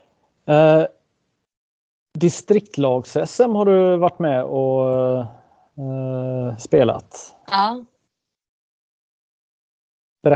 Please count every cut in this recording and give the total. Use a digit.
0